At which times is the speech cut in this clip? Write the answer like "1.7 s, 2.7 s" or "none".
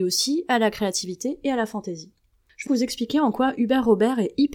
2.7 s